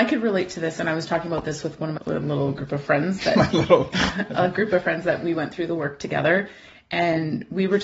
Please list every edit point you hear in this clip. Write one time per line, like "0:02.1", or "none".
0:02.0